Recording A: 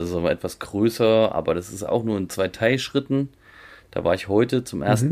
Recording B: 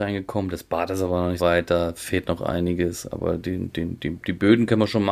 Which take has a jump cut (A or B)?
B